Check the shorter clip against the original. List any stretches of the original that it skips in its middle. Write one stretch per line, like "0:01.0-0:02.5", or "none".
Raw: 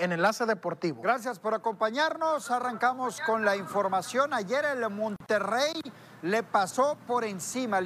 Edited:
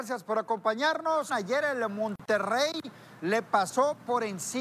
0:02.4-0:04.3